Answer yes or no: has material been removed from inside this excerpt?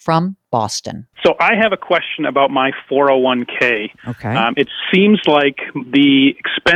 yes